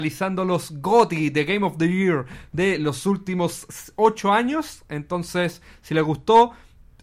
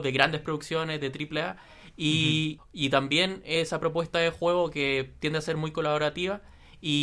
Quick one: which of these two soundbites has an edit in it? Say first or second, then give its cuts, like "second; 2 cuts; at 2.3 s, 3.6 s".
second; 1 cut; at 2.6 s